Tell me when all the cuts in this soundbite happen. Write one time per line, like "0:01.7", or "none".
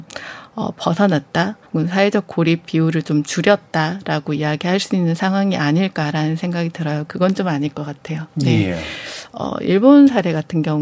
0:01.7
0:07.1